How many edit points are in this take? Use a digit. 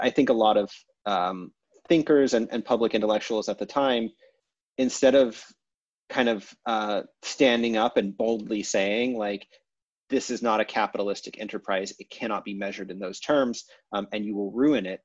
0